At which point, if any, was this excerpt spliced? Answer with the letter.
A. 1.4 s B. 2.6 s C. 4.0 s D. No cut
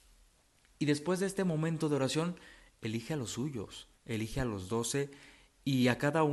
C